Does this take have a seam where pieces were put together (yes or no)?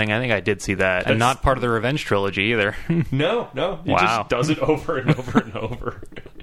yes